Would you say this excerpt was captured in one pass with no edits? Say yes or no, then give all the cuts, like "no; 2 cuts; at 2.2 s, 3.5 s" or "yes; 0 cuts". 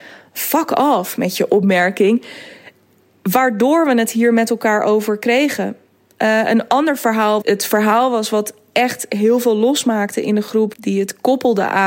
no; 2 cuts; at 7.4 s, 10.7 s